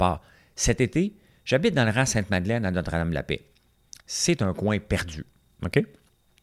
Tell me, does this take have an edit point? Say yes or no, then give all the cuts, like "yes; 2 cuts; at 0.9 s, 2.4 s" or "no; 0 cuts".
no; 0 cuts